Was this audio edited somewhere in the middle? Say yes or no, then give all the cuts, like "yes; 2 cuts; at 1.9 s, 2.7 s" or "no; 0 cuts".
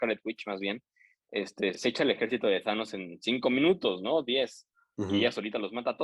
no; 0 cuts